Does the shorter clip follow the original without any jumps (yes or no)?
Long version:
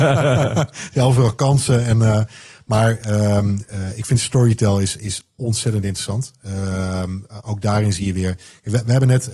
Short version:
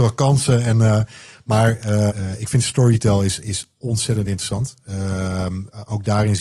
no